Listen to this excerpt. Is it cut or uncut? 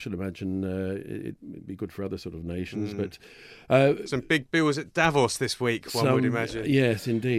uncut